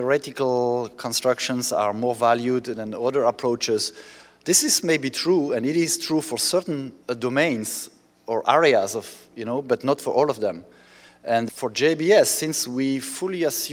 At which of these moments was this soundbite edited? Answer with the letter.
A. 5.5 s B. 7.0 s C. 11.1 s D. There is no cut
B